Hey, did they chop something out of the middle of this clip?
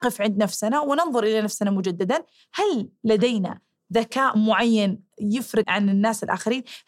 yes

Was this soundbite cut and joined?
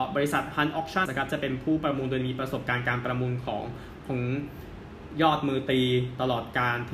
yes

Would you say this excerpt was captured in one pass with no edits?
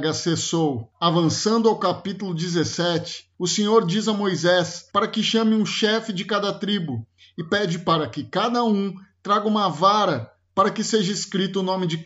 yes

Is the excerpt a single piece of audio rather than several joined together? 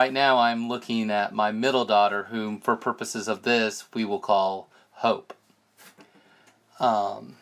yes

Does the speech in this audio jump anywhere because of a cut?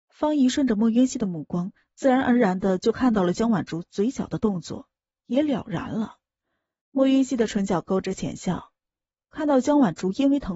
yes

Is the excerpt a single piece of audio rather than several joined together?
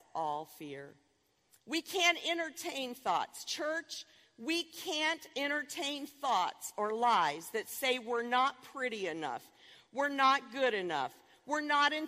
yes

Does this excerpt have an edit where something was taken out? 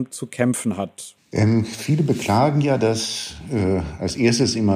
yes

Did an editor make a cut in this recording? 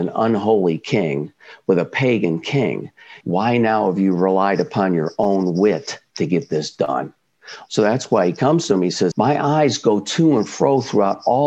yes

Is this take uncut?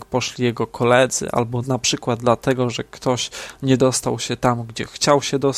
no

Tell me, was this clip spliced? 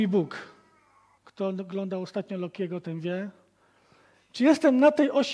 yes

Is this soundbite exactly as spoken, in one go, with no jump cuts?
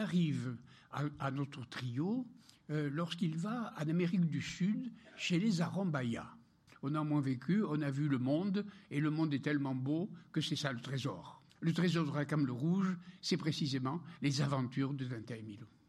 no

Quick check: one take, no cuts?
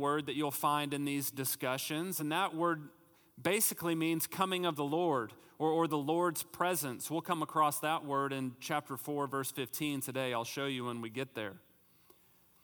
yes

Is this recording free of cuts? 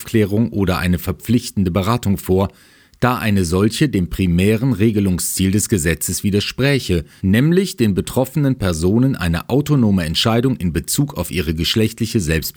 no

